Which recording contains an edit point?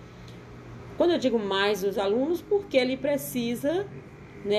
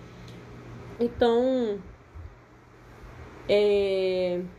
second; 1 cut; at 1.0 s

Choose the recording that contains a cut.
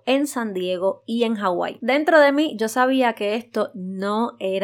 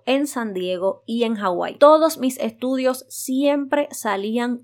first; 1 cut; at 1.8 s

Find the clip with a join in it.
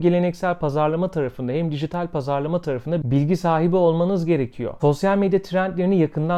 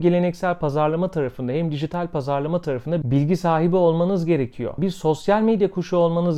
second; 1 cut; at 4.8 s

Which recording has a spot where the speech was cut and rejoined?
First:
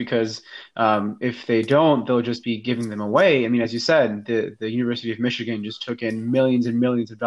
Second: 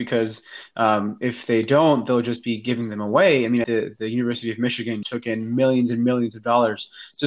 second; 2 cuts; at 3.6 s, 5.0 s

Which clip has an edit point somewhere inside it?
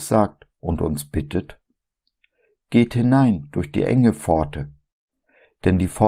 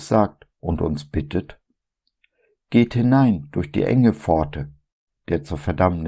second; 1 cut; at 5.1 s

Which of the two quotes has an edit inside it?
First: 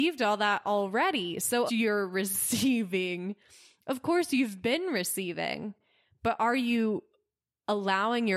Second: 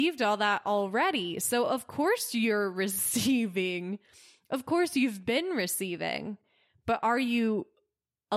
first; 1 cut; at 1.7 s

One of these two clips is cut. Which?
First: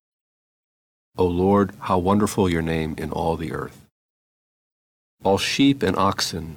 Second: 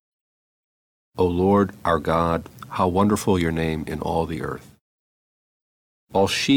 first; 1 cut; at 1.8 s

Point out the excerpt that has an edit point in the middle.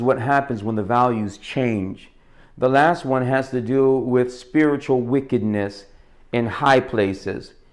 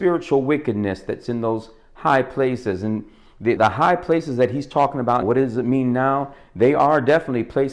second; 2 cuts; at 3.6 s, 5.2 s

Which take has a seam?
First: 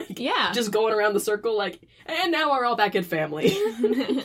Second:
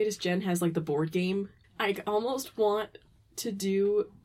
second; 1 cut; at 1.6 s

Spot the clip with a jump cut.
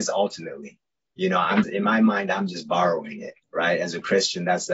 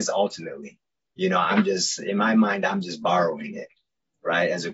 first; 2 cuts; at 1.6 s, 3.4 s

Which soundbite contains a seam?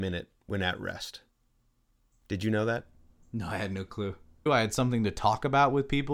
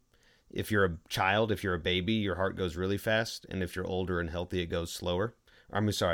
first; 1 cut; at 4.5 s

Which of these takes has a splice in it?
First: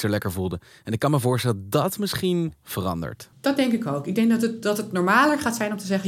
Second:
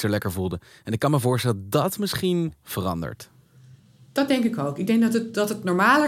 first; 1 cut; at 3.3 s

